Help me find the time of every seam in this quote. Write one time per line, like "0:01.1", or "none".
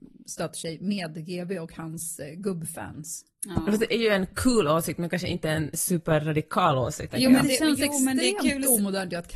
0:03.3
0:07.1